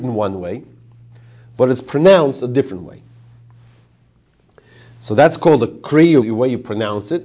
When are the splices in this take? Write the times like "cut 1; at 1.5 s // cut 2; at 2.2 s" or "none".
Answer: cut 1; at 6.2 s